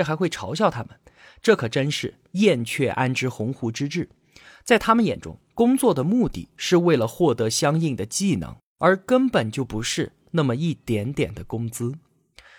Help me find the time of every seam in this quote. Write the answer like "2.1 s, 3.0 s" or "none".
none